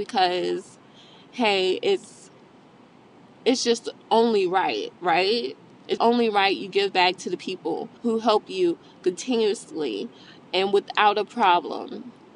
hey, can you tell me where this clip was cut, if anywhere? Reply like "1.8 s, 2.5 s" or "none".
6.0 s, 8.0 s